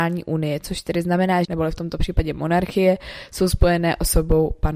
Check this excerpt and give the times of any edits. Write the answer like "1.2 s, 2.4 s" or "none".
1.4 s